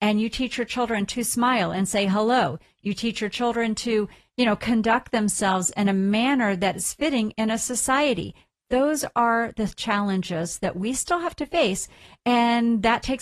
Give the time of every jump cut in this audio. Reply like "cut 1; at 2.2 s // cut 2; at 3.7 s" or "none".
none